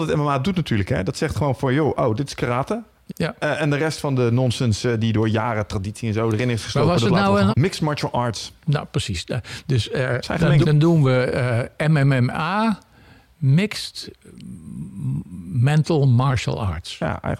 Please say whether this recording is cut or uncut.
cut